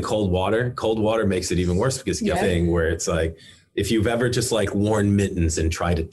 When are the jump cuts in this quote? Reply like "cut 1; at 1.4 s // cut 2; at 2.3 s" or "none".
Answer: cut 1; at 2.4 s